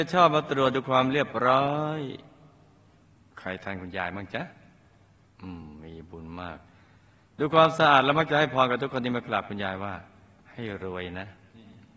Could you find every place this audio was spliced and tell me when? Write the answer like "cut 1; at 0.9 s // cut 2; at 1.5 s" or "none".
none